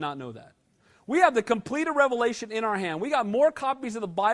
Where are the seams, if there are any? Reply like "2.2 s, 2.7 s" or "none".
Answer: none